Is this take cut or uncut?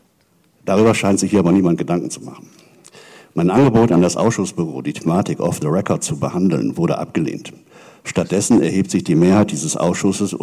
uncut